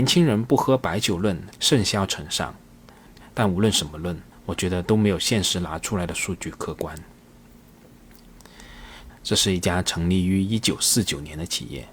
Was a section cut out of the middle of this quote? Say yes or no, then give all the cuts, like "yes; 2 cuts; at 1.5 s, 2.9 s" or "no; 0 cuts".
yes; 1 cut; at 9.1 s